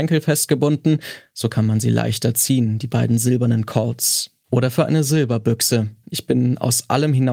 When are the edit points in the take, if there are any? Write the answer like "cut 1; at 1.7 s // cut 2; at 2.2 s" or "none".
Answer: cut 1; at 6.0 s